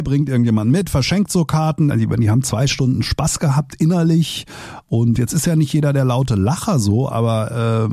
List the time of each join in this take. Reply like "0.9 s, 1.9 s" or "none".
1.9 s